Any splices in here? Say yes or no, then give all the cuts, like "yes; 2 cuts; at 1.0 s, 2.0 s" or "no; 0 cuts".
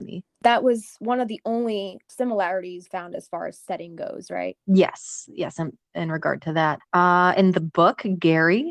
no; 0 cuts